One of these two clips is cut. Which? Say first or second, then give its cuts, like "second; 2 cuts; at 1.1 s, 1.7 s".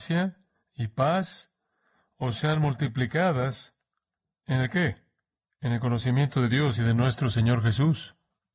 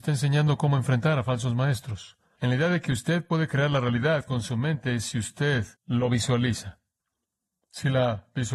second; 2 cuts; at 2.4 s, 5.7 s